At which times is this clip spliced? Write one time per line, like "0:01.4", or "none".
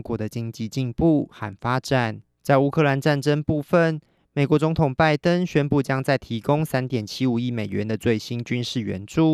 0:02.4